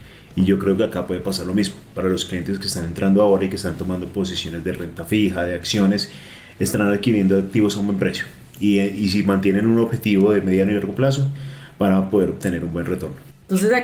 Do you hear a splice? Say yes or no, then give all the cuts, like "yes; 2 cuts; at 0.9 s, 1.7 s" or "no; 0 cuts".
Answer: no; 0 cuts